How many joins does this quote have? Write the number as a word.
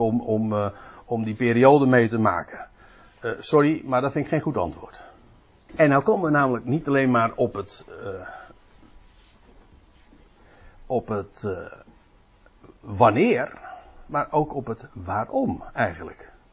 one